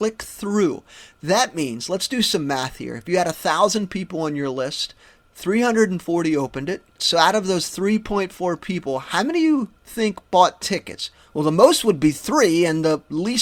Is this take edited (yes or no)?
yes